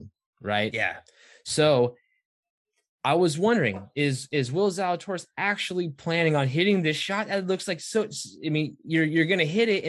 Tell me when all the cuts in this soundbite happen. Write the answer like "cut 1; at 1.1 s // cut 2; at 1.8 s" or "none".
none